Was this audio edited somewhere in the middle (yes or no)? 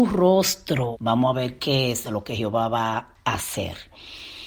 yes